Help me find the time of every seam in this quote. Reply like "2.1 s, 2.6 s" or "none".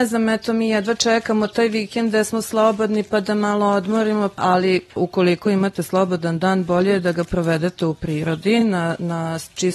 none